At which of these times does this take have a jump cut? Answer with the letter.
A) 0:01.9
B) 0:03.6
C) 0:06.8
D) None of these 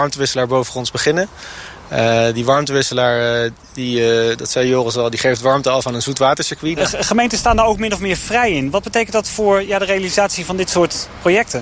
C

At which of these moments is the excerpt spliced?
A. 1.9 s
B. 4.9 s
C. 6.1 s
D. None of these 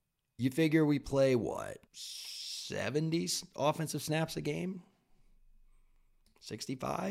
A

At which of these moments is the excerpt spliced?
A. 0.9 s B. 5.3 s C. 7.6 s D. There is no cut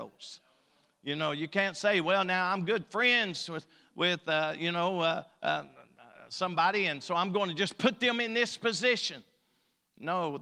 D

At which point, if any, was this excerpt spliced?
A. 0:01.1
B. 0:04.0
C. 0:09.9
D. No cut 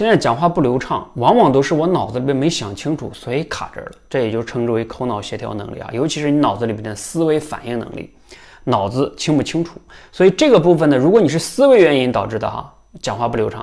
D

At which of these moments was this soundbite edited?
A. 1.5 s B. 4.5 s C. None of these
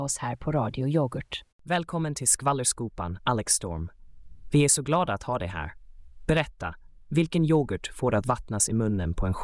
A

